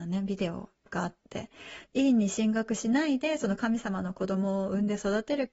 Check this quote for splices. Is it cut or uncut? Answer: cut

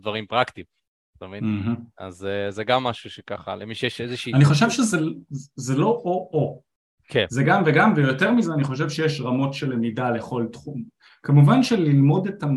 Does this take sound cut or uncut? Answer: uncut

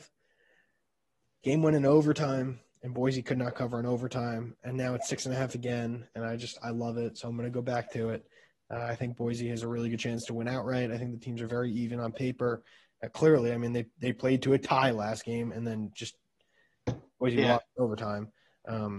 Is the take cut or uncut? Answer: uncut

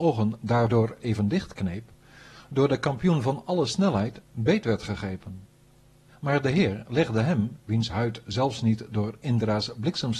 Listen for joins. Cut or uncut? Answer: cut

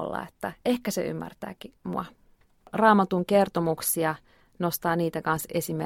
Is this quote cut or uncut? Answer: uncut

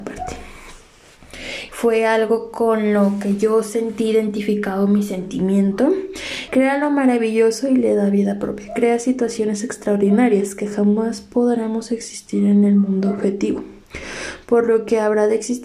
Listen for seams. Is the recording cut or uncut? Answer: cut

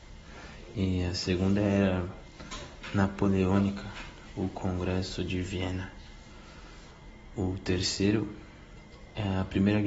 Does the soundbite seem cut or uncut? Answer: uncut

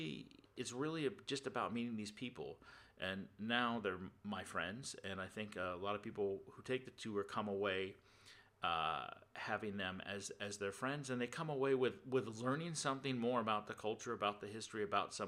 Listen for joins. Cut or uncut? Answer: uncut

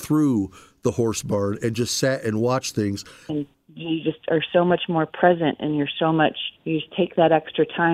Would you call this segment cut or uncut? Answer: cut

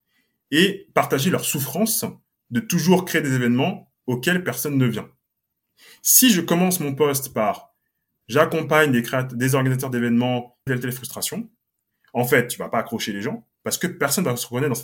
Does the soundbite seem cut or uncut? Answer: cut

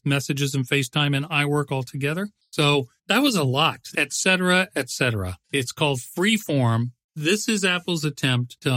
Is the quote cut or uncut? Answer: cut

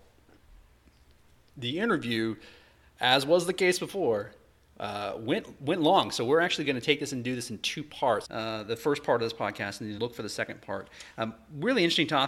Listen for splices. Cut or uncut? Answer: cut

